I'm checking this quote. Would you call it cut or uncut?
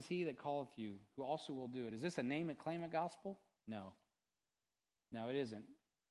uncut